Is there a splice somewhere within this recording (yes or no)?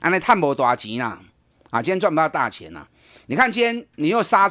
no